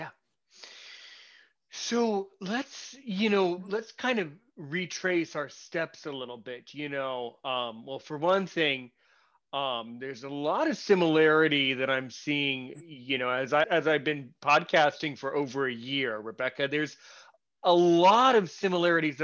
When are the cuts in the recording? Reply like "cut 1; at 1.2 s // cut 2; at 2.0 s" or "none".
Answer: cut 1; at 13.6 s